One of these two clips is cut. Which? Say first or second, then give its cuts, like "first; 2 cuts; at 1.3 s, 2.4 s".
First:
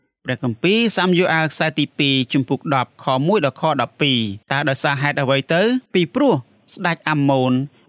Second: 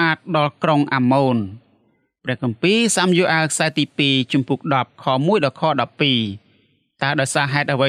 first; 2 cuts; at 4.4 s, 5.9 s